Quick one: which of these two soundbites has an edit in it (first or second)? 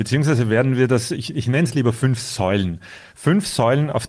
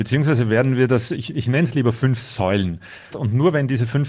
second